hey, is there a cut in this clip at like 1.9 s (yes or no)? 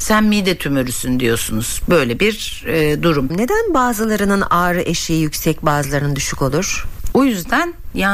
no